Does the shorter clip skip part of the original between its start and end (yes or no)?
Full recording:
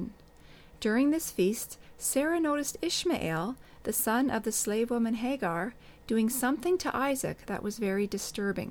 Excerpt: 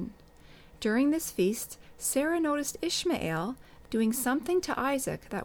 yes